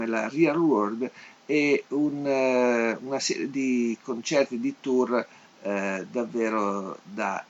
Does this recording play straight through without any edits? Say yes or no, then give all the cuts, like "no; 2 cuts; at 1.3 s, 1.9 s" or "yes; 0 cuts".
yes; 0 cuts